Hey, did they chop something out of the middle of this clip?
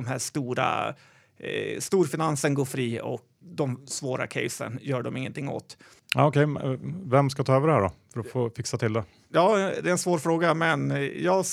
yes; 1 cut; at 3.4 s

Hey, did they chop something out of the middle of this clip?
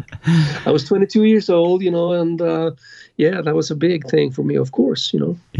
no; 0 cuts

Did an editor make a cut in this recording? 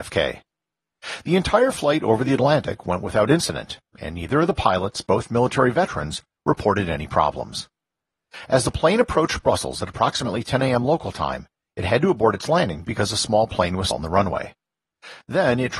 yes; 1 cut; at 13.9 s

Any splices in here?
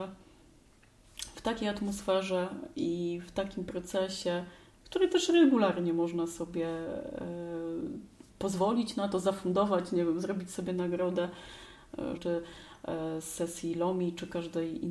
yes; 1 cut; at 12.2 s

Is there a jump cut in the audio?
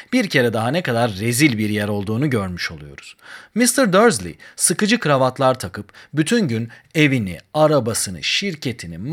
no; 0 cuts

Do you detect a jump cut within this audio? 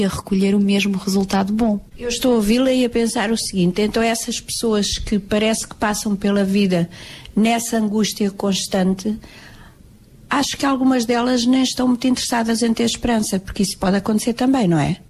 no; 0 cuts

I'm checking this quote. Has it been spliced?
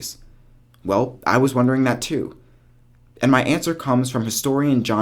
no; 0 cuts

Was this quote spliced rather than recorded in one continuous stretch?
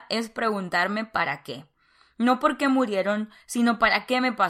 yes; 1 cut; at 3.4 s

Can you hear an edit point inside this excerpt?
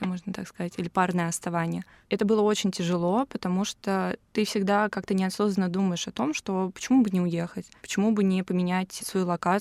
yes; 1 cut; at 4.3 s

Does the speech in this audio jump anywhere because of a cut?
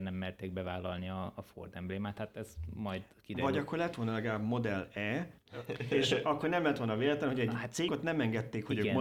yes; 1 cut; at 7.9 s

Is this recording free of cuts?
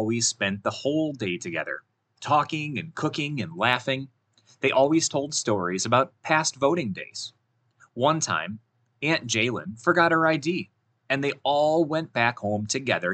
yes; 0 cuts

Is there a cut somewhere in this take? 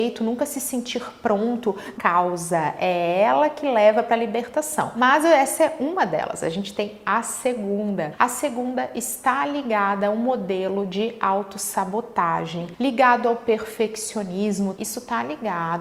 yes; 2 cuts; at 2.0 s, 14.7 s

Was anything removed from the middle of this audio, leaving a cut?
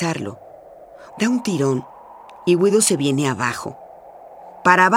yes; 1 cut; at 1.1 s

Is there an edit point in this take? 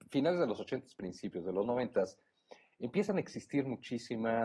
no; 0 cuts

